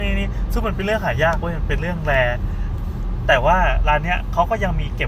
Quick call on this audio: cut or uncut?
uncut